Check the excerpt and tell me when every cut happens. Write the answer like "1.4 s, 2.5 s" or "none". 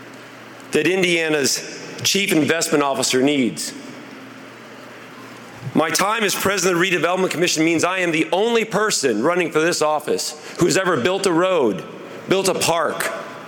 none